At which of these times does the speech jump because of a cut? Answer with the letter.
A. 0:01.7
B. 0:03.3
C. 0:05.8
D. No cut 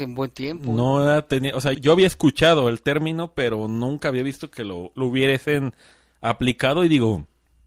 A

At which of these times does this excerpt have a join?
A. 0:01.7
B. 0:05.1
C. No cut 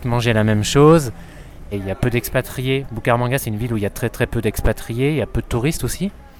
A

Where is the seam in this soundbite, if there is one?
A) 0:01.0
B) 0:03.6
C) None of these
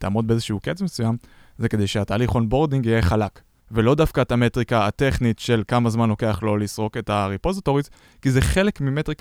B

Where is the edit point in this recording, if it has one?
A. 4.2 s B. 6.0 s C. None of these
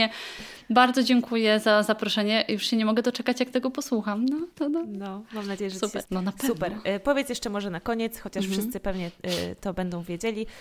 B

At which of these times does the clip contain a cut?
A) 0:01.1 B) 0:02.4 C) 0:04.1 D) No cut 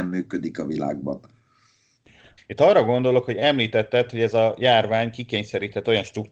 B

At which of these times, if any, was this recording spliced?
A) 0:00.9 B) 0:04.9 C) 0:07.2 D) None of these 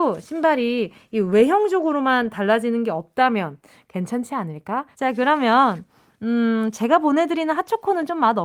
B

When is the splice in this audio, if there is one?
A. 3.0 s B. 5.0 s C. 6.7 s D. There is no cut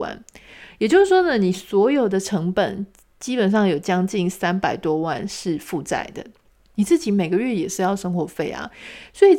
C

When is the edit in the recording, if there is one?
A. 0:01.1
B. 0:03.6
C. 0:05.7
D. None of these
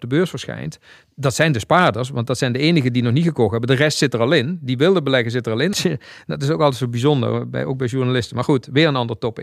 C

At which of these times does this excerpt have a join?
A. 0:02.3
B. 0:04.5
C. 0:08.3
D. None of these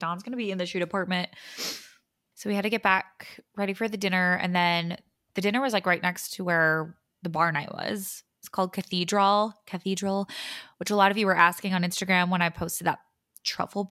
A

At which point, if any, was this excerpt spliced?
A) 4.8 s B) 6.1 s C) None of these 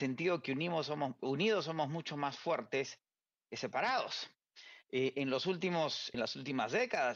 B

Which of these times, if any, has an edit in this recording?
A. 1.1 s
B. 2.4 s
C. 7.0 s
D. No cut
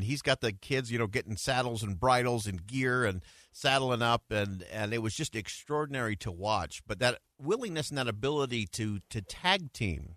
C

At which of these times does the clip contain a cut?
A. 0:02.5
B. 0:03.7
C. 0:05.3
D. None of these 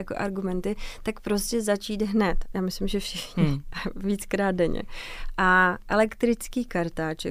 A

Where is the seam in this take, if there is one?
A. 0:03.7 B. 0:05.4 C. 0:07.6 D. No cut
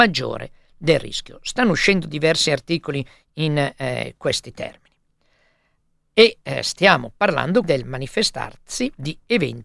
C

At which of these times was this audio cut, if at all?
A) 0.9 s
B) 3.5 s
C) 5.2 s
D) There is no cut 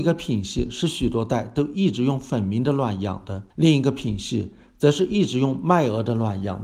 B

